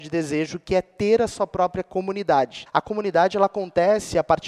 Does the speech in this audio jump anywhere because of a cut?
yes; 1 cut; at 2.7 s

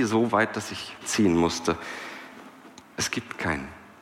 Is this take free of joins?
no; 2 cuts; at 1.0 s, 2.8 s

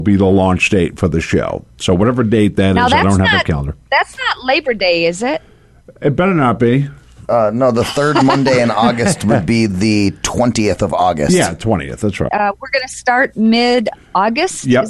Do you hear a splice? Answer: yes; 1 cut; at 12.3 s

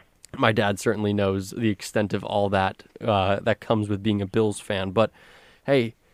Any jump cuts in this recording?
no; 0 cuts

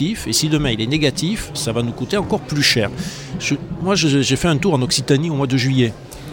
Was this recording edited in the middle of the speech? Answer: no; 0 cuts

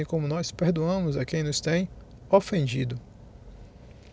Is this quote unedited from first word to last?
yes; 0 cuts

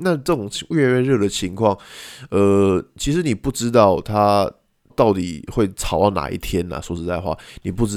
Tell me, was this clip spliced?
yes; 1 cut; at 4.9 s

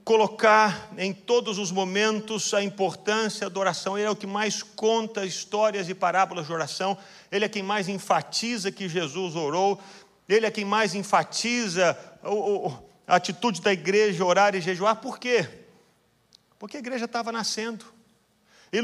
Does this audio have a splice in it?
no; 0 cuts

